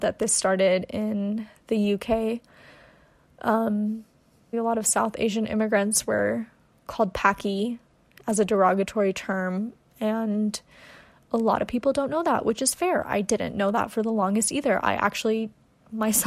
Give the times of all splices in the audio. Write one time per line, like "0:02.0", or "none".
0:04.5